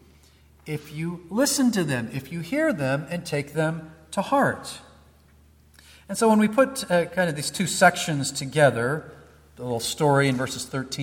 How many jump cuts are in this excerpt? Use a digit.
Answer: 0